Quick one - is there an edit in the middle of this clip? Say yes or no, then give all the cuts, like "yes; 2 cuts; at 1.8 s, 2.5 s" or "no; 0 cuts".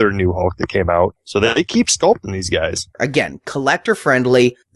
yes; 2 cuts; at 1.2 s, 2.9 s